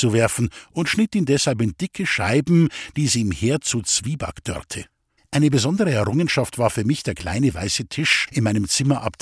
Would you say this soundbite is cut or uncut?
cut